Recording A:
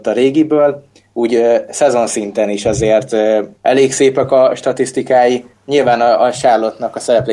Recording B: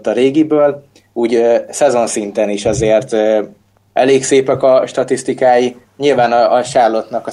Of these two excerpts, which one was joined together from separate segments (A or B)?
A